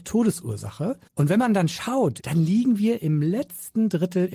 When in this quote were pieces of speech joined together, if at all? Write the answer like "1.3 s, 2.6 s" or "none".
1.1 s, 2.2 s